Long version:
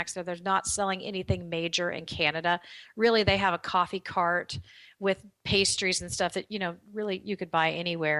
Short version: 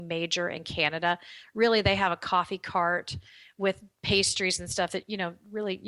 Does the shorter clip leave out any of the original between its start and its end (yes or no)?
no